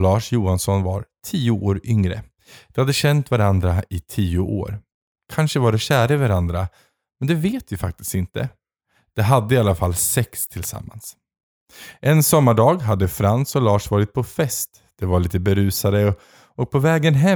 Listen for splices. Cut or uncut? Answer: uncut